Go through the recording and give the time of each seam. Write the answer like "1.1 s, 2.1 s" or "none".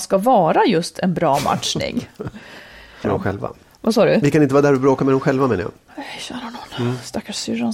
3.0 s